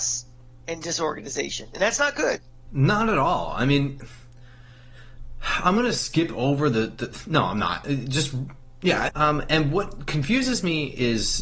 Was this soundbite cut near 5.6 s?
no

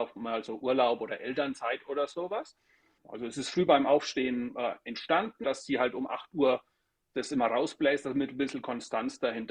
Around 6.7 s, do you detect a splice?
no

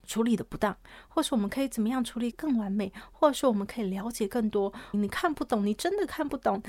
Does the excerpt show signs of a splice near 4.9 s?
yes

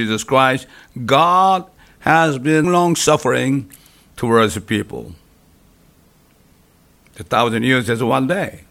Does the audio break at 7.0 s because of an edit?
no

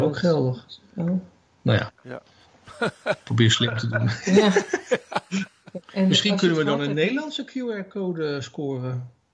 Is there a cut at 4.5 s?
no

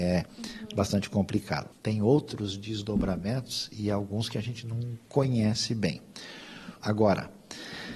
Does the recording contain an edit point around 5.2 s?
no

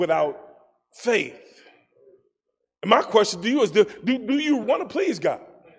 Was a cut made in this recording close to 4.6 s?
yes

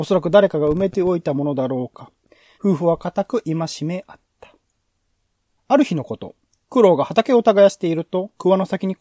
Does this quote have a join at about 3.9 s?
no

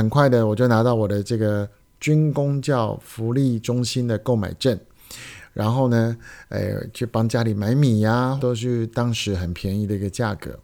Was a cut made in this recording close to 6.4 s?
no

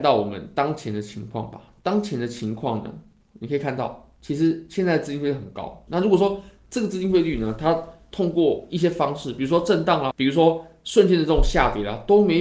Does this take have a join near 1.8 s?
no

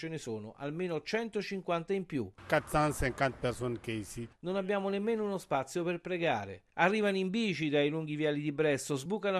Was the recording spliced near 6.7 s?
no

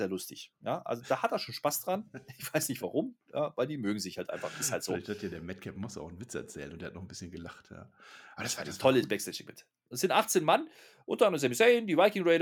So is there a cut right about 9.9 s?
yes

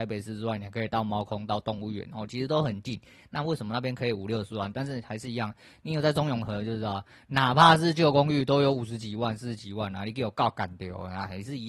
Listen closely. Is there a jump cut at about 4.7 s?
yes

